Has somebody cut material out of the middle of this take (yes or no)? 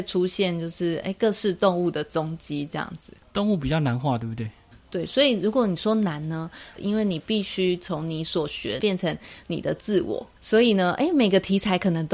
yes